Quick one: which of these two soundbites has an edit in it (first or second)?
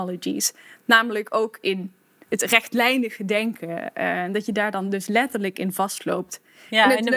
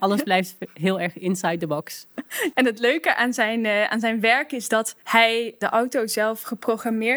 second